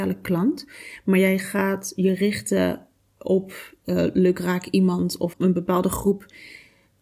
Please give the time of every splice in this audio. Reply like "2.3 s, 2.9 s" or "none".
5.3 s